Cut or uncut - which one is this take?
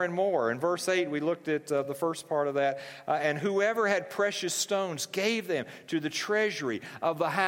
uncut